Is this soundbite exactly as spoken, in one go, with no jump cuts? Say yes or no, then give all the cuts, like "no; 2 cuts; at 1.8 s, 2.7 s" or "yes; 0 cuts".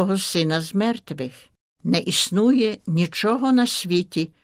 no; 1 cut; at 1.7 s